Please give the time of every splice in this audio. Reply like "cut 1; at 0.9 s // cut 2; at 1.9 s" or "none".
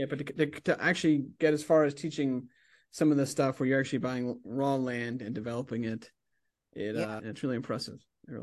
cut 1; at 7.2 s